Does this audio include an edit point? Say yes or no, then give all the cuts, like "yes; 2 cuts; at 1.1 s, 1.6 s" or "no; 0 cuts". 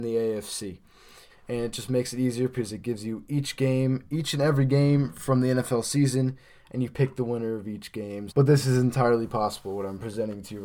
yes; 2 cuts; at 1.3 s, 8.3 s